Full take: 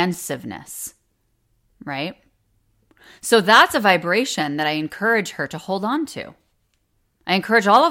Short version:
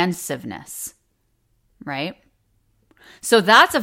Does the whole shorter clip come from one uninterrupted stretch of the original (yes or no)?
yes